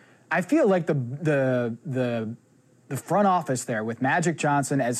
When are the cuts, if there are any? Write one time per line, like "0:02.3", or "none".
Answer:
none